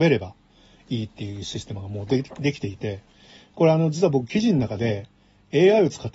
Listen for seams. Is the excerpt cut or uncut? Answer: uncut